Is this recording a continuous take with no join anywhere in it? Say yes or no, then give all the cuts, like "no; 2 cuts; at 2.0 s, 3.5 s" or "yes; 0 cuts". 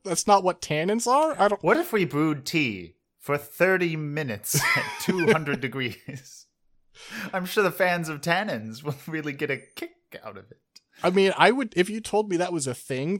yes; 0 cuts